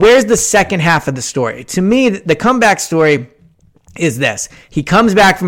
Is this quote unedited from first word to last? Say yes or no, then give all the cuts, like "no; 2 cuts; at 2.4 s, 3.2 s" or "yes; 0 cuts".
yes; 0 cuts